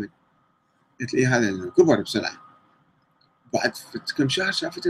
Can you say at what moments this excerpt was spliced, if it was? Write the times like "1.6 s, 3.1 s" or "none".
0.9 s

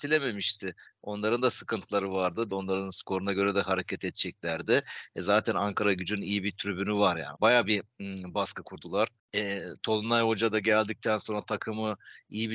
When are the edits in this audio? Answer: 2.5 s, 7.3 s

